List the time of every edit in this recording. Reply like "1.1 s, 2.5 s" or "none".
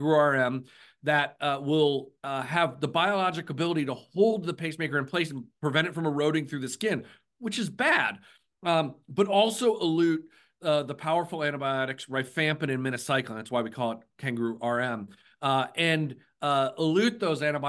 none

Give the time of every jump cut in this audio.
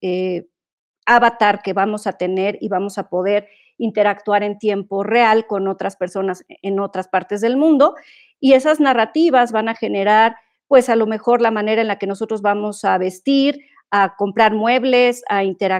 none

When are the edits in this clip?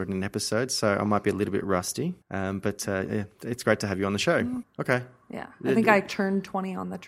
2.2 s, 4.6 s

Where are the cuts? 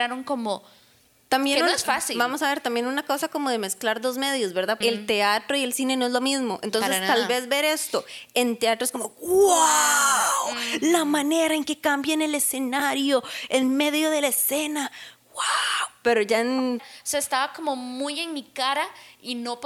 4.8 s, 16.8 s

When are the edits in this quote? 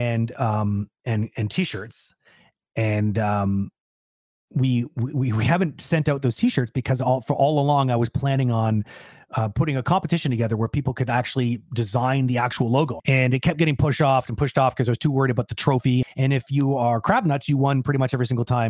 13.0 s, 16.0 s

